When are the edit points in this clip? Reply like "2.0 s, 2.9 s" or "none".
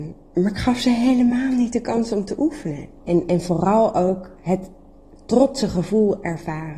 3.0 s